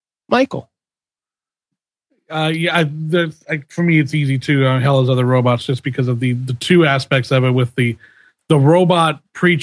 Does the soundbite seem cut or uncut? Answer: uncut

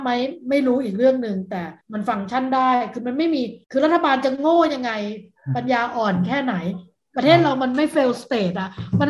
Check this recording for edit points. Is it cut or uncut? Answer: cut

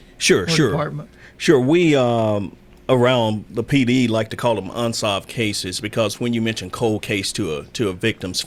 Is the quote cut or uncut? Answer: uncut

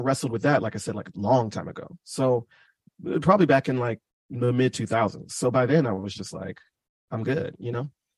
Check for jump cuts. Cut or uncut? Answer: uncut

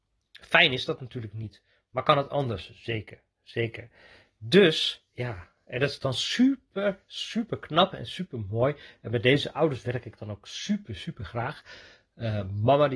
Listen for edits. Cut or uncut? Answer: uncut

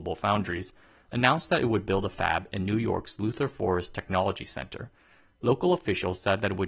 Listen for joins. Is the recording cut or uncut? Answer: uncut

